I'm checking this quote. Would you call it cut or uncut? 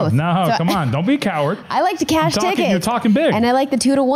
uncut